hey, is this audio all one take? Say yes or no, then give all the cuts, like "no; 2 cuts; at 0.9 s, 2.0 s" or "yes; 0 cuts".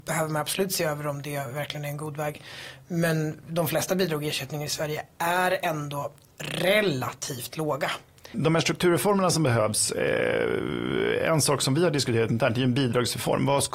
no; 1 cut; at 8.3 s